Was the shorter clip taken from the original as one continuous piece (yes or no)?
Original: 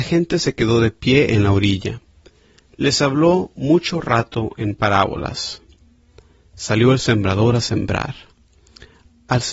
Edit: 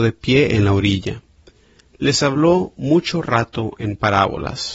yes